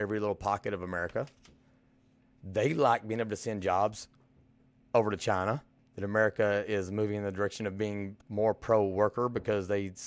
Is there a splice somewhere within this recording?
yes; 2 cuts; at 5.8 s, 8.2 s

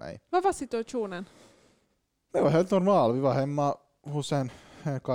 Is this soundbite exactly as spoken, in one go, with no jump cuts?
yes; 0 cuts

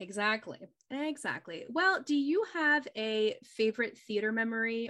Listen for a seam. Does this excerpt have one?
no; 0 cuts

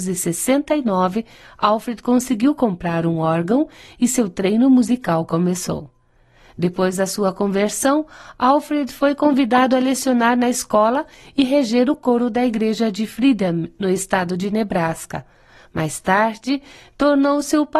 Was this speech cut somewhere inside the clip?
no; 0 cuts

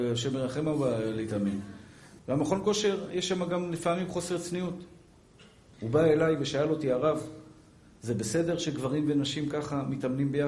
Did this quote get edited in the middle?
yes; 2 cuts; at 2.2 s, 5.7 s

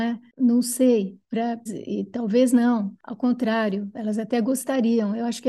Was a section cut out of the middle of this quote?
yes; 1 cut; at 1.7 s

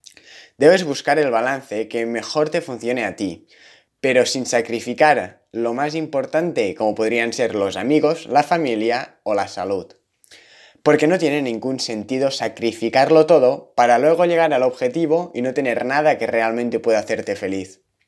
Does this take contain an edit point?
yes; 1 cut; at 3.9 s

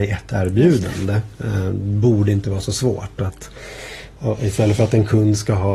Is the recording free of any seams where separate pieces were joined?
yes; 0 cuts

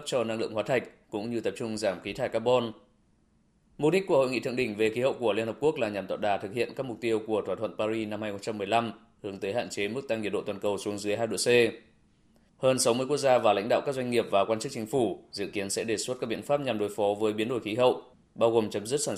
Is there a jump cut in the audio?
no; 0 cuts

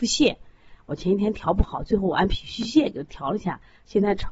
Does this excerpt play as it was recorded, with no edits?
yes; 0 cuts

